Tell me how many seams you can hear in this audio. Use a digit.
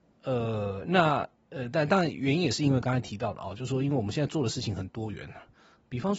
0